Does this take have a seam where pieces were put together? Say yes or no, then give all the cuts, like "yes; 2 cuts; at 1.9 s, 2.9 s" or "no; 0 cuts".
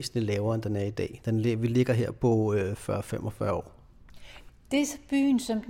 yes; 1 cut; at 4.5 s